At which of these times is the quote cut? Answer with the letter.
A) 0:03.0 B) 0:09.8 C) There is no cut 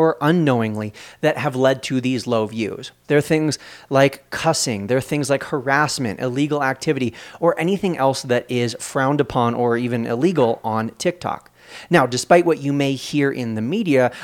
A